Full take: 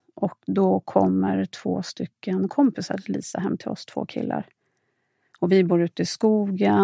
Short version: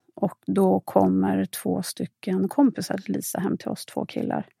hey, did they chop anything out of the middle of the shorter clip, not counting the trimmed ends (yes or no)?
no